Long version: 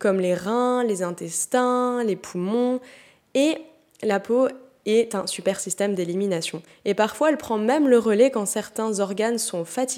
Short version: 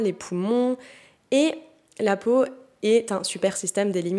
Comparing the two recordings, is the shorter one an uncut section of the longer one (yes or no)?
yes